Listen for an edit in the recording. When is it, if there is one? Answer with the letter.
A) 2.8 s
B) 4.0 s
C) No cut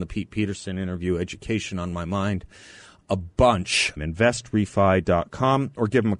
B